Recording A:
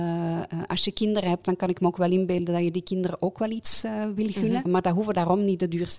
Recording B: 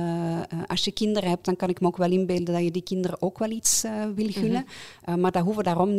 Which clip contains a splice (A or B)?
A